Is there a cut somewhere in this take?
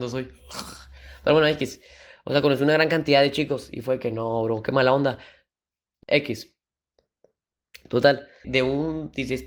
yes; 2 cuts; at 6.0 s, 8.4 s

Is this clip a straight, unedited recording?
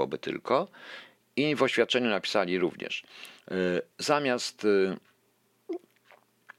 no; 2 cuts; at 1.2 s, 3.9 s

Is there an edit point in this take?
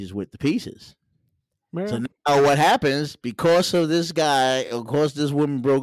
no; 0 cuts

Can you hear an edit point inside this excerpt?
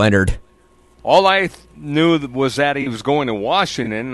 yes; 1 cut; at 1.0 s

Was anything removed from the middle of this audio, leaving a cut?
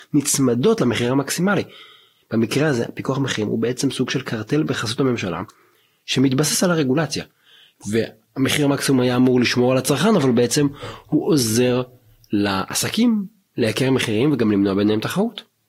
no; 0 cuts

